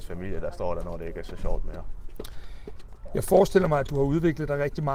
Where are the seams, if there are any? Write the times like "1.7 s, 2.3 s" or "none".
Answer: none

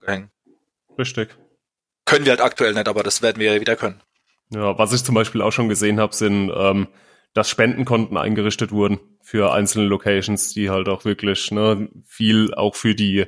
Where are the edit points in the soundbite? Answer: none

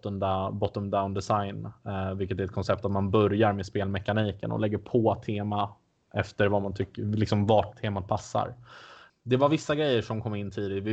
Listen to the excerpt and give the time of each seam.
7.7 s, 9.1 s

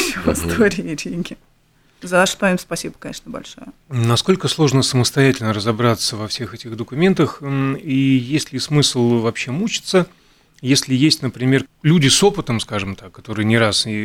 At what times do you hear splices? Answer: 3.8 s, 11.6 s

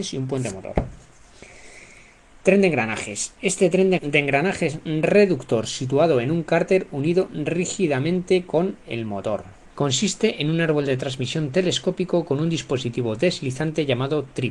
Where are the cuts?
4.0 s, 9.7 s

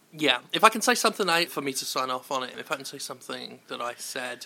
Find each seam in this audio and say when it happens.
1.5 s, 2.5 s

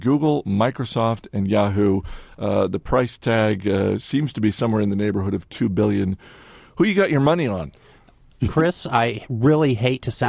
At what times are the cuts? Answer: none

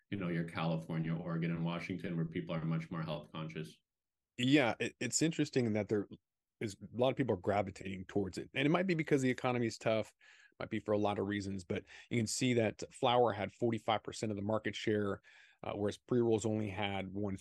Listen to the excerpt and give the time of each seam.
none

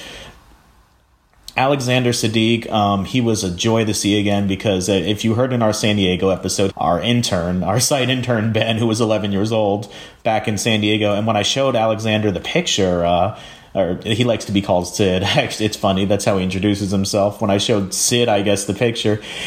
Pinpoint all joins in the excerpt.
6.7 s

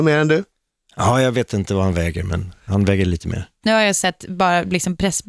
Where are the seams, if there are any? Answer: 3.6 s

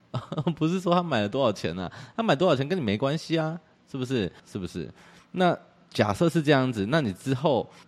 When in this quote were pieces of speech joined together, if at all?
4.4 s

